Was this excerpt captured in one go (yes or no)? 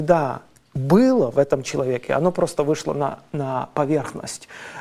yes